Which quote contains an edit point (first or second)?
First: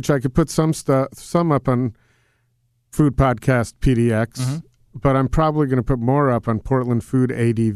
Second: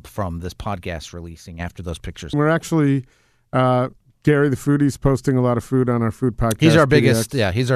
second